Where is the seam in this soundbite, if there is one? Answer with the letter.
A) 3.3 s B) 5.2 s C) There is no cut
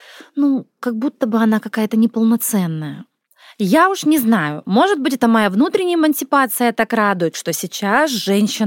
C